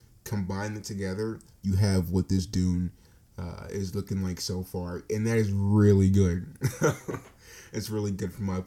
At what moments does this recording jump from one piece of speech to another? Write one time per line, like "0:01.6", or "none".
none

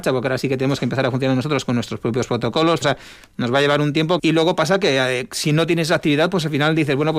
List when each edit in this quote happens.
0:02.8
0:04.2

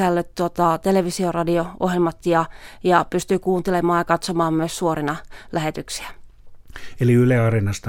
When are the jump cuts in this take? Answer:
none

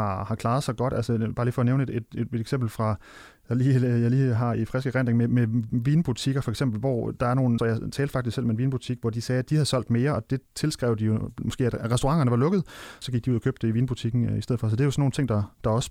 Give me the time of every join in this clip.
0:07.6
0:13.0

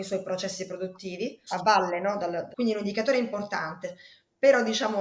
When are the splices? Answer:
0:01.5
0:02.5

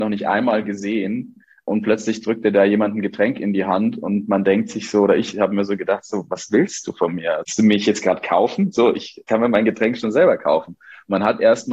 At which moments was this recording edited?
none

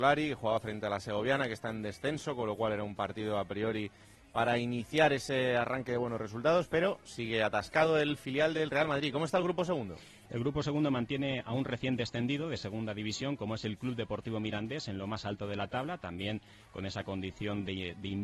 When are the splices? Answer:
none

